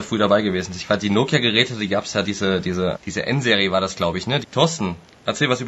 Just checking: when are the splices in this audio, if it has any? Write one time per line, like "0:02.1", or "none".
0:02.9
0:04.4